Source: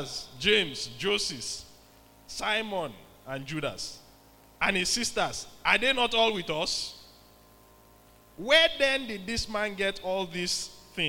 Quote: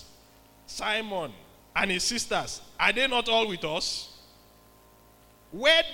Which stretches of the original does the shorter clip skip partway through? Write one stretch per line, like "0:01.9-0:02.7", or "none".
0:03.2-0:04.5